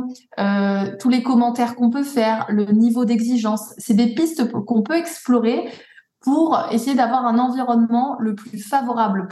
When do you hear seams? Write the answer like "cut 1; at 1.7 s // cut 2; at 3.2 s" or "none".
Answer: none